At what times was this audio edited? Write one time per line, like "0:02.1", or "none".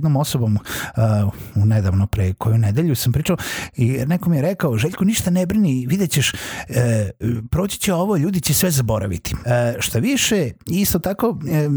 0:09.4